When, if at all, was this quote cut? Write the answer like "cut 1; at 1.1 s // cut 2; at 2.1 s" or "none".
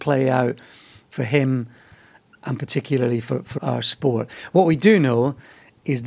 cut 1; at 3.6 s